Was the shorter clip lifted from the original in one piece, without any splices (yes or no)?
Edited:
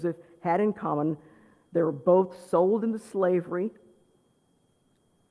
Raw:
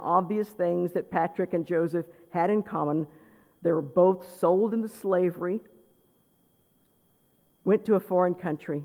yes